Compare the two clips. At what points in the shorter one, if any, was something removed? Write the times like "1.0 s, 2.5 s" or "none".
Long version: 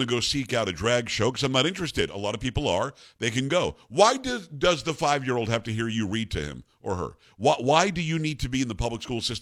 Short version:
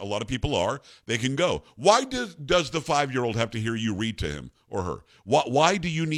none